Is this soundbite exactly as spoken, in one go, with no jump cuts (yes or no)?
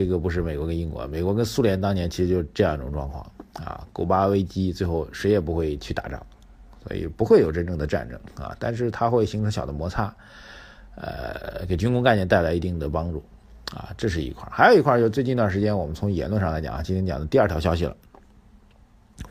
yes